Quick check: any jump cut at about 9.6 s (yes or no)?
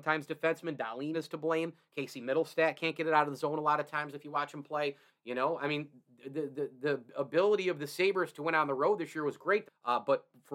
yes